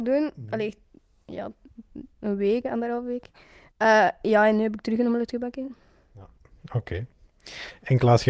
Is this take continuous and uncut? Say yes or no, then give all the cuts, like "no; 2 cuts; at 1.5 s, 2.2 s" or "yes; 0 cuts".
no; 1 cut; at 2.6 s